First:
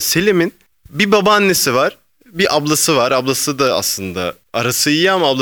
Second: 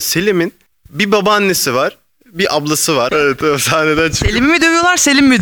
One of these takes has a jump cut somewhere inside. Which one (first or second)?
second